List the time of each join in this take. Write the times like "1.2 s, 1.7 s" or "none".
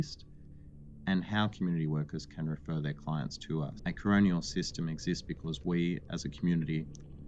3.8 s